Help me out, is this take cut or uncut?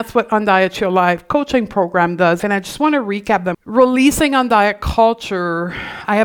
cut